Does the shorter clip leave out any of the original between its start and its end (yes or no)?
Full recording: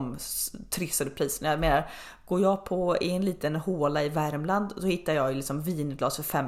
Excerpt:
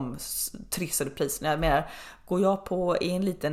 no